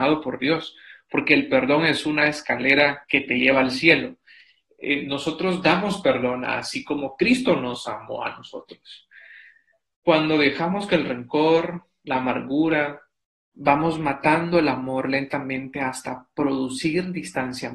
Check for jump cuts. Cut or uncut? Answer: cut